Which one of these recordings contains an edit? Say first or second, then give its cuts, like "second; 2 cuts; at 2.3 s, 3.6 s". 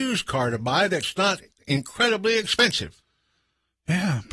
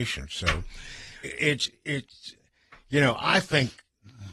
second; 1 cut; at 1.2 s